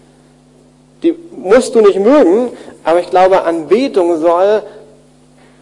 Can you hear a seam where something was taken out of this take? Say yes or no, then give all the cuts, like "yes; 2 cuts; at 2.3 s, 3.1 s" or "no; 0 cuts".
yes; 1 cut; at 0.9 s